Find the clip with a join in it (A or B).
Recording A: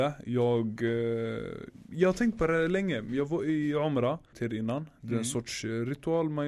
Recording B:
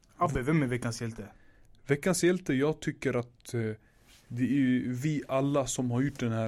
A